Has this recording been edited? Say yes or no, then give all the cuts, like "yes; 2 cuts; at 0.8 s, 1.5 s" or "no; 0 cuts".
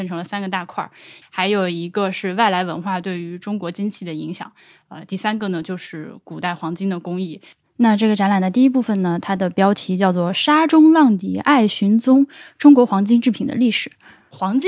yes; 1 cut; at 1.2 s